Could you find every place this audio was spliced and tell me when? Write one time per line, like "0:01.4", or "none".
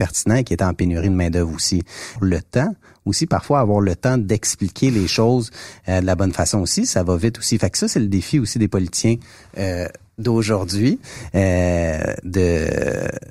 0:02.2